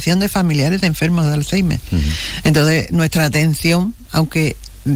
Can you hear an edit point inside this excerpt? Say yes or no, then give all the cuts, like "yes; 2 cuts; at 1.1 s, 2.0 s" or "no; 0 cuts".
no; 0 cuts